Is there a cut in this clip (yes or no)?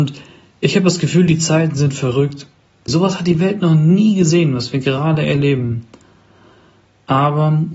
yes